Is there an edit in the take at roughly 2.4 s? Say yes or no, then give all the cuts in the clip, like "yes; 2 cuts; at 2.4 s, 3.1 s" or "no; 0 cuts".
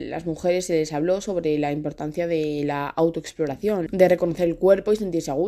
no; 1 cut; at 3.9 s